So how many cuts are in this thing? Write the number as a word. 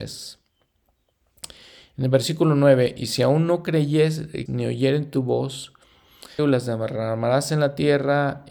two